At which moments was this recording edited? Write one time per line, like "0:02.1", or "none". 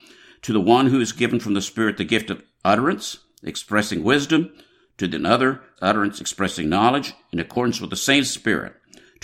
0:05.8